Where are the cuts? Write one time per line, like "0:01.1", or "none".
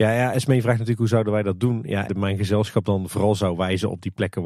0:02.1